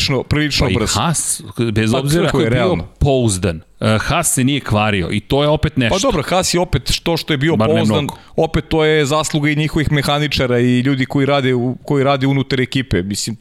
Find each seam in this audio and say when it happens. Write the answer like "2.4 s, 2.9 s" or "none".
2.3 s